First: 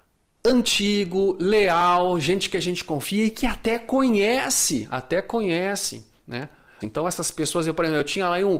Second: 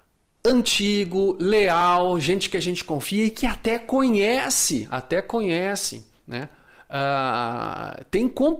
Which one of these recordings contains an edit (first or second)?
first